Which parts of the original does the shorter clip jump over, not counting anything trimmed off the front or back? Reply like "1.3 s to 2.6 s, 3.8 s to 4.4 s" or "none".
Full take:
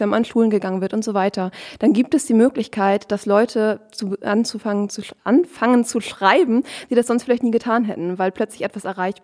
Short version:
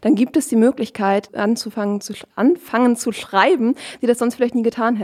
3.1 s to 4.2 s